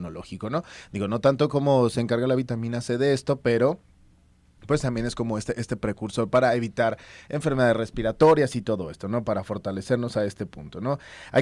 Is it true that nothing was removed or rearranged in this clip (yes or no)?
yes